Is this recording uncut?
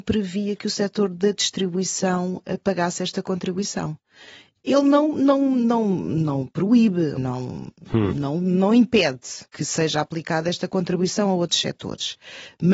no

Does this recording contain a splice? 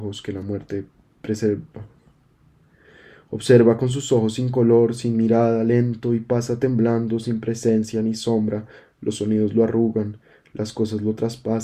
no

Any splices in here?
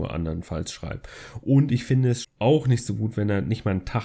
yes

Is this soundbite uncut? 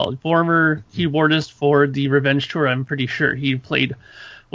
yes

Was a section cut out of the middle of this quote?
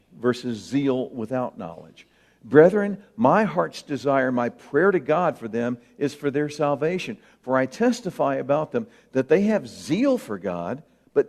no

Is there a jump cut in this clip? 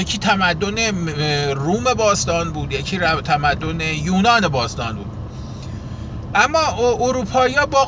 no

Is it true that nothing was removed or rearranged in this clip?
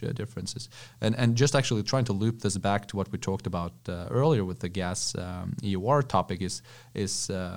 yes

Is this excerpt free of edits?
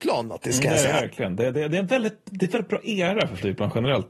yes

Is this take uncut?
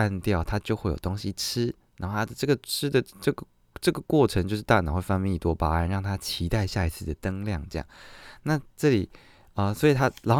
yes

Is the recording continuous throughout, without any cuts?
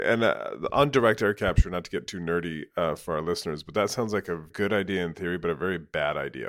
yes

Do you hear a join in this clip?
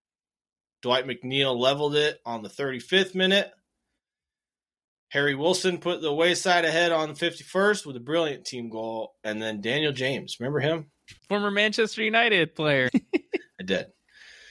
yes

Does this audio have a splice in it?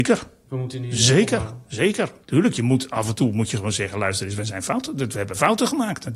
yes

